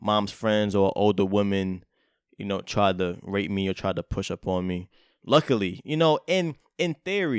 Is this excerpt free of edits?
yes; 0 cuts

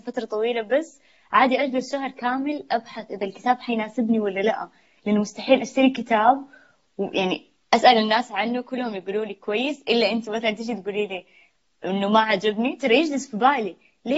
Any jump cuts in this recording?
no; 0 cuts

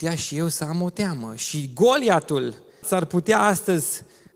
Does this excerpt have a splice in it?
yes; 1 cut; at 2.8 s

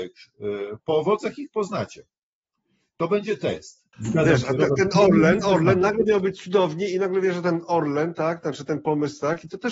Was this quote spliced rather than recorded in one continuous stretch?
yes; 2 cuts; at 3.9 s, 5.4 s

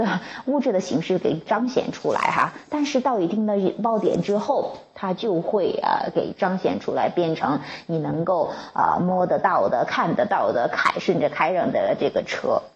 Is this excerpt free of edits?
yes; 0 cuts

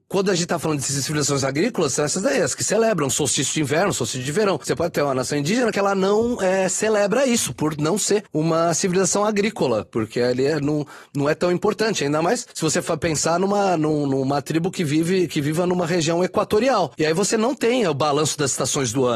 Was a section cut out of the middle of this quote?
no; 0 cuts

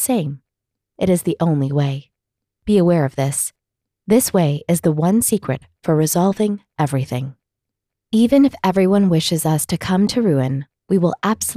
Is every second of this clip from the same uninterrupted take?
no; 1 cut; at 7.9 s

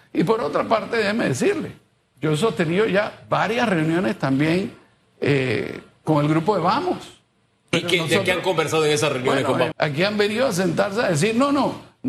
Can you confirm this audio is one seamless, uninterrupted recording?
no; 2 cuts; at 7.5 s, 9.7 s

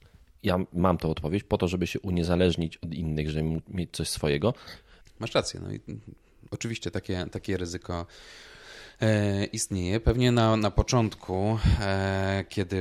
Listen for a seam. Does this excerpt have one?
yes; 1 cut; at 5.0 s

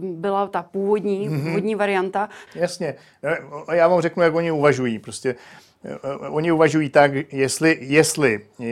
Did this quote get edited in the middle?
yes; 1 cut; at 2.5 s

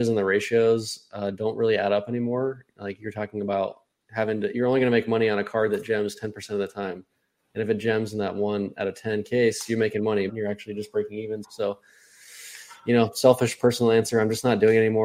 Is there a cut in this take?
yes; 2 cuts; at 10.3 s, 11.4 s

